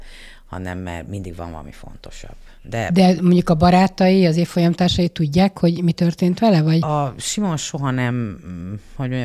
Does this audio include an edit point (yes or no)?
no